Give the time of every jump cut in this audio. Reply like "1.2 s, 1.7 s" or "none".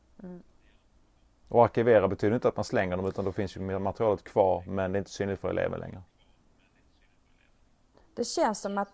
1.4 s, 7.9 s